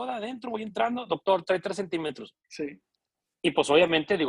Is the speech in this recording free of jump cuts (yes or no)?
no